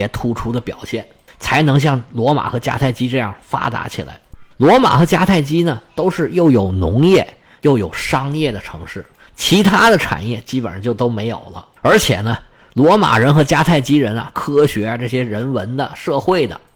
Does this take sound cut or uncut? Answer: cut